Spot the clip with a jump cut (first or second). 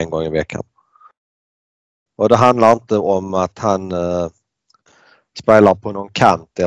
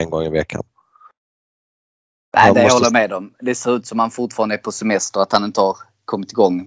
first